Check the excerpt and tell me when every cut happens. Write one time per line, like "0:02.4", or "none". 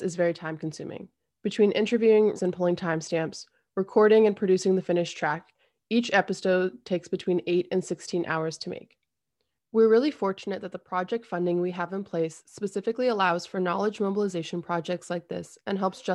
0:02.4